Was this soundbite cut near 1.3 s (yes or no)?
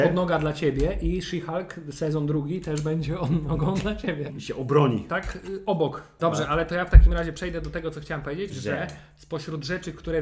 no